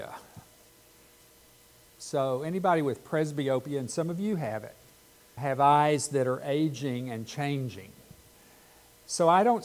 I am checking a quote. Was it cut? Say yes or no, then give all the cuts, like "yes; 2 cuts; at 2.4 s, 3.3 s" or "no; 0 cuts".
yes; 2 cuts; at 1.9 s, 5.4 s